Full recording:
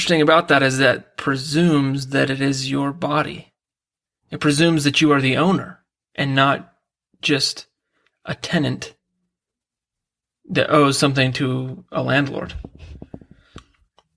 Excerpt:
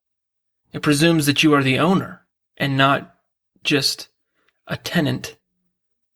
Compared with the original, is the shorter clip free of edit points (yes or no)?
yes